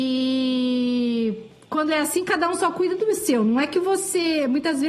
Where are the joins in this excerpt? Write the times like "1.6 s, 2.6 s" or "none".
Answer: none